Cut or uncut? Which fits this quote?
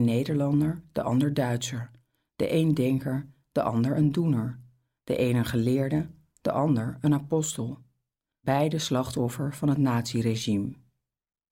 cut